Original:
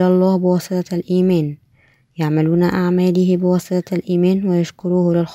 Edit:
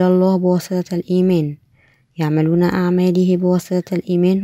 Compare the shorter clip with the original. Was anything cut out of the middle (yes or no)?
no